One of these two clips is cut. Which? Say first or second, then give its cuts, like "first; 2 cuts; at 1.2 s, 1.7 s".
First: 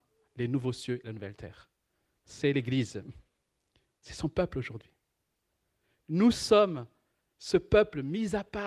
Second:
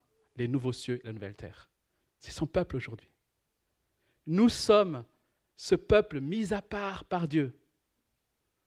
second; 1 cut; at 2.0 s